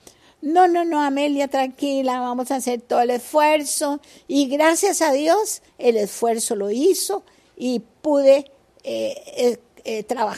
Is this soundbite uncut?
yes; 0 cuts

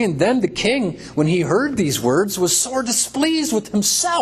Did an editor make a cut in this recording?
no; 0 cuts

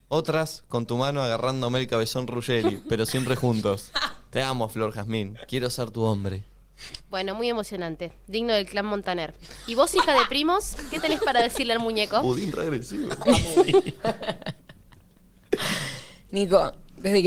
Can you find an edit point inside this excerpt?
no; 0 cuts

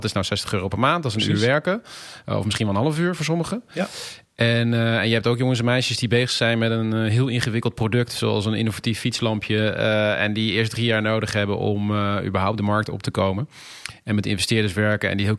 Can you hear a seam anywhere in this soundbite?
no; 0 cuts

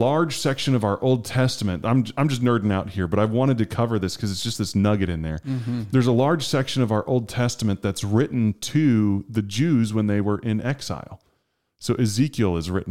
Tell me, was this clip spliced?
no; 0 cuts

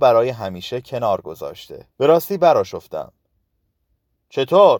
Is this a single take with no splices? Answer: no; 1 cut; at 1.9 s

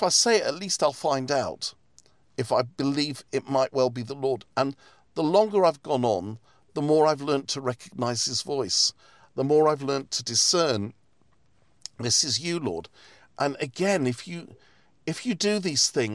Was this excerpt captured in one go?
yes; 0 cuts

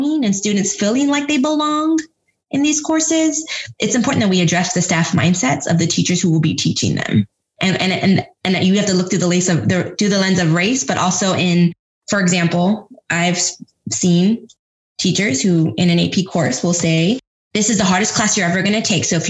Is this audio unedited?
yes; 0 cuts

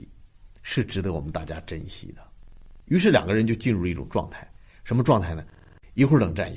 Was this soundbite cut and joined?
yes; 1 cut; at 2.8 s

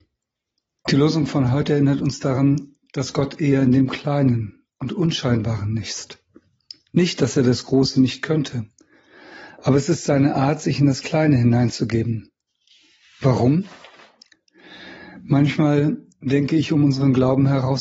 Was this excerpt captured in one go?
yes; 0 cuts

